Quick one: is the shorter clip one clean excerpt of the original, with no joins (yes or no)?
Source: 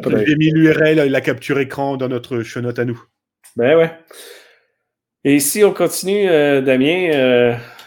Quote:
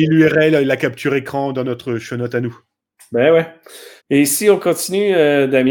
no